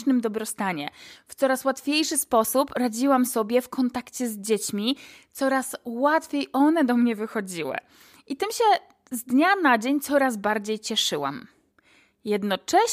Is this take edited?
no; 0 cuts

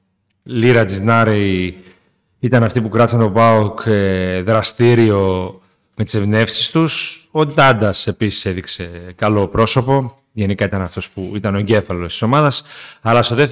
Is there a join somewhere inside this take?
no; 0 cuts

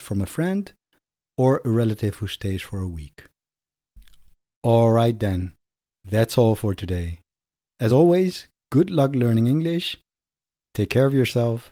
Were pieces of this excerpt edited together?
no; 0 cuts

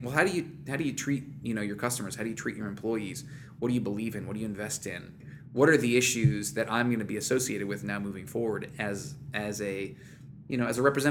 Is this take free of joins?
yes; 0 cuts

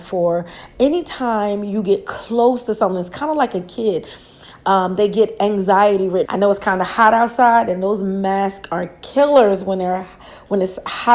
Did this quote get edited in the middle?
yes; 1 cut; at 6.3 s

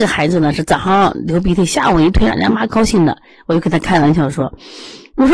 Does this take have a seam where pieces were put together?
yes; 1 cut; at 2.3 s

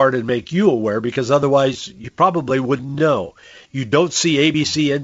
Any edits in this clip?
no; 0 cuts

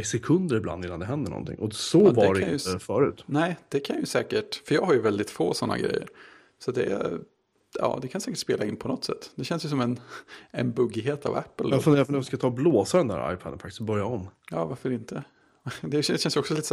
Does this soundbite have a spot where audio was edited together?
no; 0 cuts

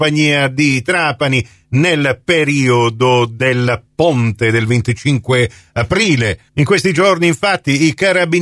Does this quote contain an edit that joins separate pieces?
no; 0 cuts

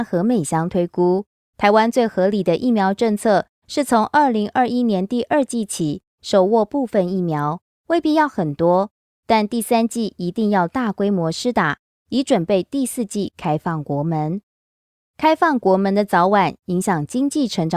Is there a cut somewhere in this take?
no; 0 cuts

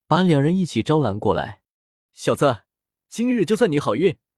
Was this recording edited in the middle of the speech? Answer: yes; 1 cut; at 2.1 s

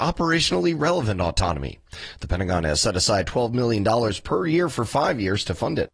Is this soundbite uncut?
yes; 0 cuts

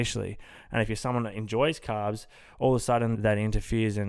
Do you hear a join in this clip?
yes; 1 cut; at 3.2 s

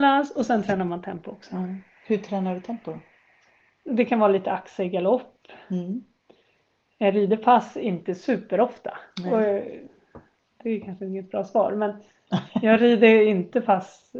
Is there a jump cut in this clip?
no; 0 cuts

